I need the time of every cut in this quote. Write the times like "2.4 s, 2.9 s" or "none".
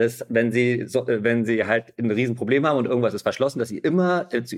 none